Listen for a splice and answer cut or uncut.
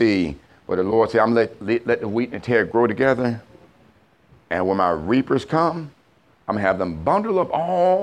uncut